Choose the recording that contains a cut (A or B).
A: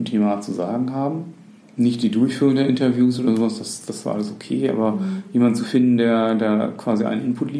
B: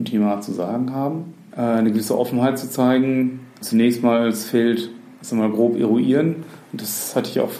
B